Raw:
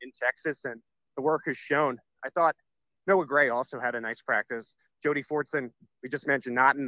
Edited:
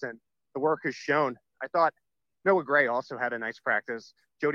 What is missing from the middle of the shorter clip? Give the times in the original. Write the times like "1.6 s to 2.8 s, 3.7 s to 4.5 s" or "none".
none